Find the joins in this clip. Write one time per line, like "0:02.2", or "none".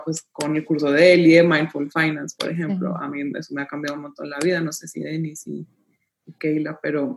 none